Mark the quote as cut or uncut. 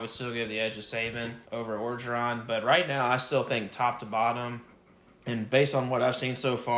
cut